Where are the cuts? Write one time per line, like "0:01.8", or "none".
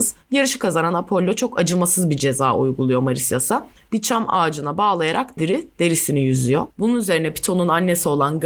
0:05.4
0:06.7